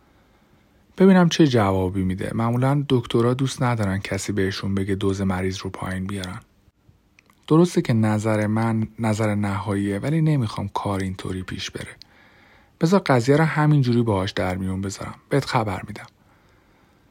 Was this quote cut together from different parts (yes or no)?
no